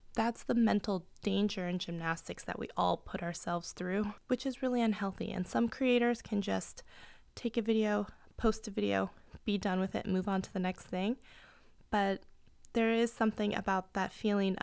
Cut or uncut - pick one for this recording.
uncut